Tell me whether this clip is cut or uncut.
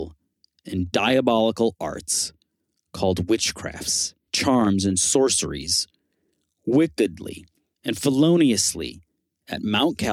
cut